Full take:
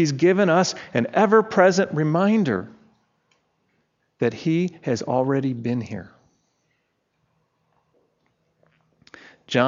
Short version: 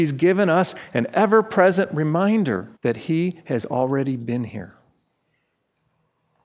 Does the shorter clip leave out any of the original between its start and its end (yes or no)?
yes